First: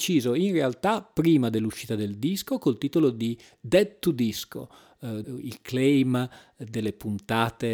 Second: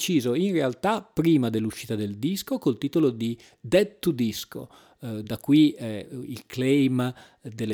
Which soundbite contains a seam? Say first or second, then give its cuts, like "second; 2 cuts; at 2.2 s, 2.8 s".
first; 1 cut; at 5.2 s